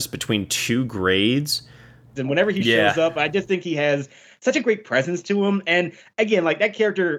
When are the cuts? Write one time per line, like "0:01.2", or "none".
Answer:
0:02.2